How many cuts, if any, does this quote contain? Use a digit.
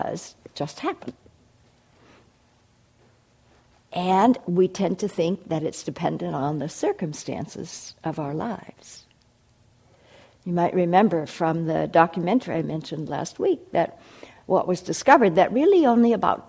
0